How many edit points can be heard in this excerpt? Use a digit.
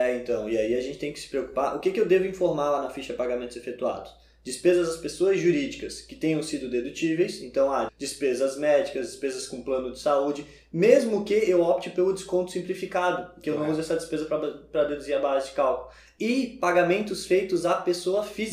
1